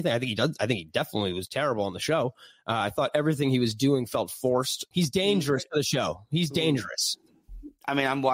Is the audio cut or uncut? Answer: cut